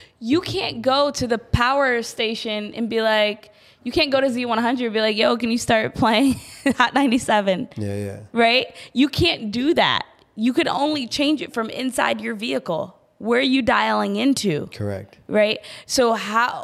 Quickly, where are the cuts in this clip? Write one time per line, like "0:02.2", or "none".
none